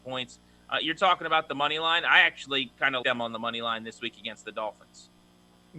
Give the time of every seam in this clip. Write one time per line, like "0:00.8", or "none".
0:03.0